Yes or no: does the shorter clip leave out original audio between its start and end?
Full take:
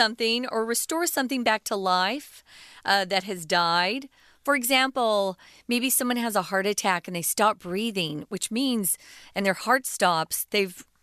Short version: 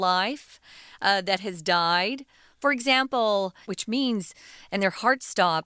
yes